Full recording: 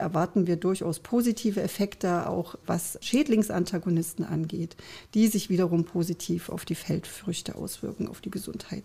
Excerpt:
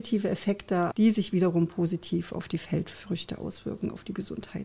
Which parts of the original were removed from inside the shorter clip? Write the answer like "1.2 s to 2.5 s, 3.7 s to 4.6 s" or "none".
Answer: 2.2 s to 5.1 s